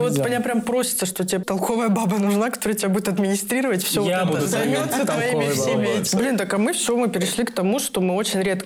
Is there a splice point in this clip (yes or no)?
yes